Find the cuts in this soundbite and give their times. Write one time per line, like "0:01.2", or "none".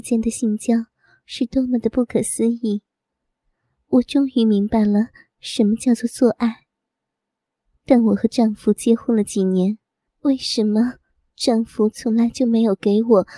0:10.1